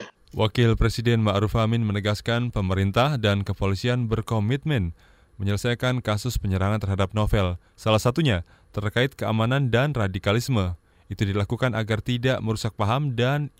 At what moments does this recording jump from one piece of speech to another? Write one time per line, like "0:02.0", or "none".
0:07.7